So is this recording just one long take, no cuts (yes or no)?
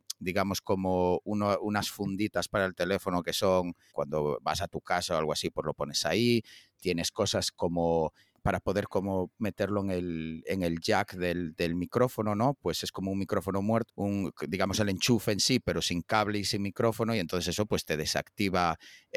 no